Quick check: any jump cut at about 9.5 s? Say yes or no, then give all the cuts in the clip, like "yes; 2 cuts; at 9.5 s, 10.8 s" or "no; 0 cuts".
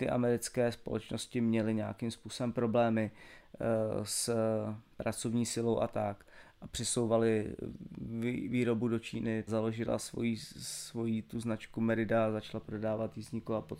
yes; 2 cuts; at 4.9 s, 9.5 s